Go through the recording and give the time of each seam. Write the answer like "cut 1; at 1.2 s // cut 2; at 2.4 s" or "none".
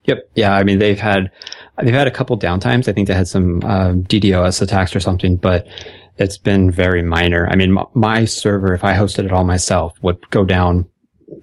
none